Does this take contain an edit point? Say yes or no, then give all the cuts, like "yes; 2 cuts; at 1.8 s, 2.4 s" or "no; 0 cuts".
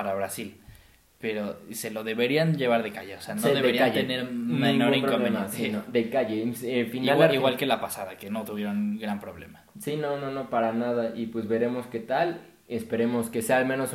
no; 0 cuts